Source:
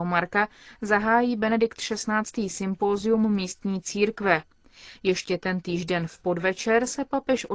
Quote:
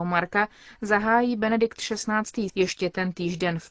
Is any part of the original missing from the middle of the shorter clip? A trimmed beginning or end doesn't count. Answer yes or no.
yes